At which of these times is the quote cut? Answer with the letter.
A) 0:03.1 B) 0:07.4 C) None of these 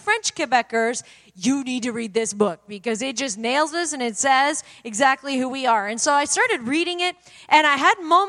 C